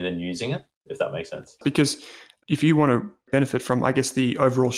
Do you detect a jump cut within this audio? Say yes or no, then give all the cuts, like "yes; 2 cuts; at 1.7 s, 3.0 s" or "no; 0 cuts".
yes; 1 cut; at 1.6 s